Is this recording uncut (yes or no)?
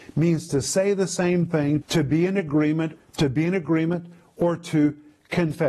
no